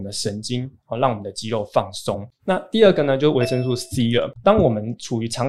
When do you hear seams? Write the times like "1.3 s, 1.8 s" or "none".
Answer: 2.3 s